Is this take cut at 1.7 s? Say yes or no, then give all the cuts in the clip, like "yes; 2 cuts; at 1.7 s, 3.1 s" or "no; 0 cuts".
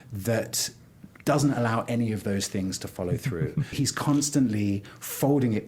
no; 1 cut; at 3.7 s